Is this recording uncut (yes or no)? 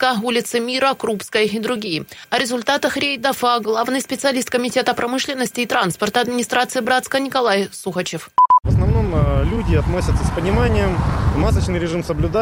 yes